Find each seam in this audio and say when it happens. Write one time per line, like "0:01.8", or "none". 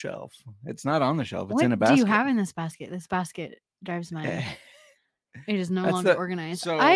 none